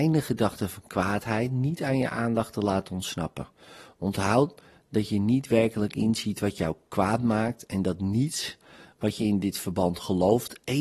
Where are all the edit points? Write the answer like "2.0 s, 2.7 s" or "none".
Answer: none